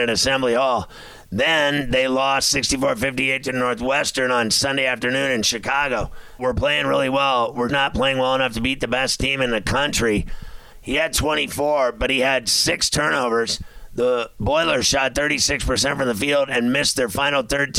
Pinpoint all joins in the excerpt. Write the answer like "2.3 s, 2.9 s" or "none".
6.4 s, 7.7 s, 10.7 s

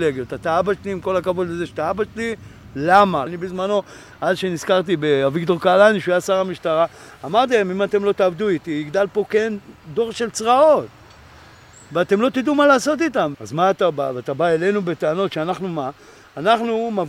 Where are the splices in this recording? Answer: 3.3 s, 13.3 s

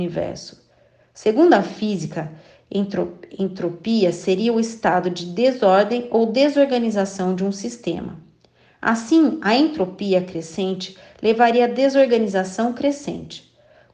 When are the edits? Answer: none

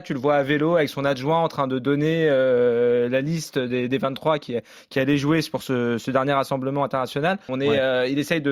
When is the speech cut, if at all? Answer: 7.5 s

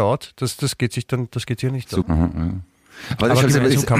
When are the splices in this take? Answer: 2.0 s

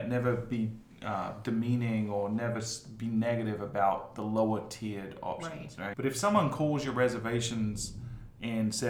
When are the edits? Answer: 5.9 s

